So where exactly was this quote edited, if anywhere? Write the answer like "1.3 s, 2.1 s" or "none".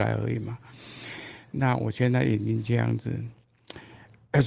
none